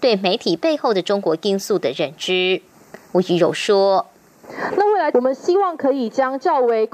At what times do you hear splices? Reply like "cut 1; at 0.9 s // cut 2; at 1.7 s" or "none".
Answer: cut 1; at 5.1 s